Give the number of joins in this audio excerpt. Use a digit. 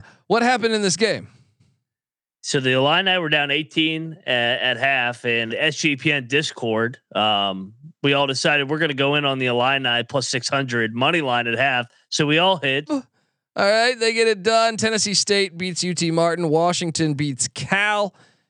2